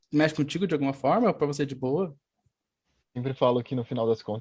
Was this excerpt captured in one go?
no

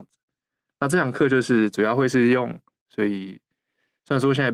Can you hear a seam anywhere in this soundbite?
yes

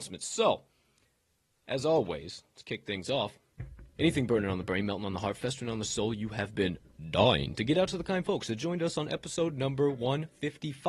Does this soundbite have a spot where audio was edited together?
yes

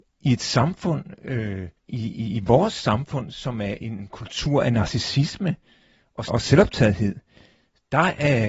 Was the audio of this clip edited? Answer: yes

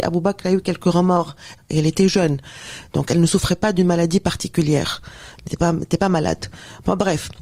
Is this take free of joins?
no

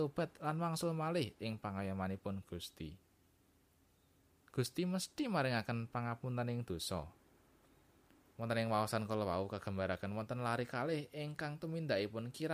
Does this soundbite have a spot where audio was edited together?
no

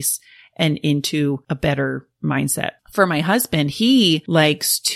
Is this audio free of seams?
yes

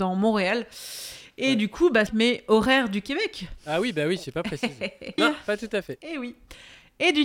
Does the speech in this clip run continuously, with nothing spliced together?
no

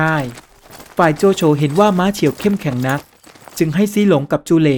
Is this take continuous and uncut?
yes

